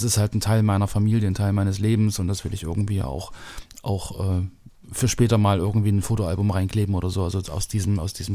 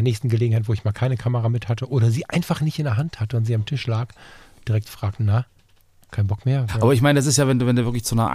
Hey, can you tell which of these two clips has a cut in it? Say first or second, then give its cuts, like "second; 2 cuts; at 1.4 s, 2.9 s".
second; 1 cut; at 6.7 s